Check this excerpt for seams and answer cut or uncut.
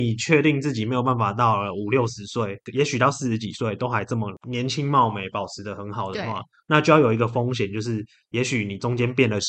uncut